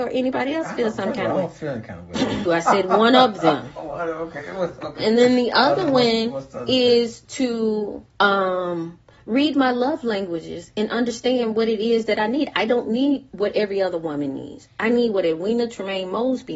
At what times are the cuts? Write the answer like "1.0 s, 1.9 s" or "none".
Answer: 2.5 s, 8.1 s

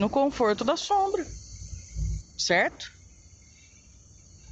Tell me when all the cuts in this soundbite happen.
2.2 s

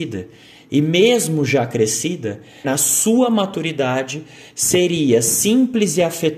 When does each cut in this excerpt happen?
2.6 s

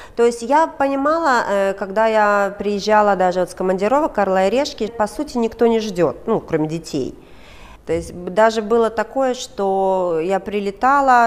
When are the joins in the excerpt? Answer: 4.9 s

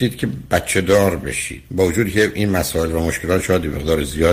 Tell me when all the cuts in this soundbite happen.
1.7 s

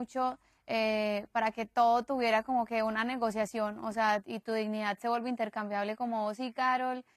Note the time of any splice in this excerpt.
4.2 s

